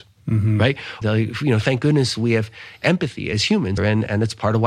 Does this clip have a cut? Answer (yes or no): yes